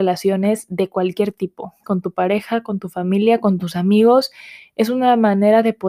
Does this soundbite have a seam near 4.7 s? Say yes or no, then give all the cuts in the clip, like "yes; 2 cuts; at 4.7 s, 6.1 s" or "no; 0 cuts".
no; 1 cut; at 1.8 s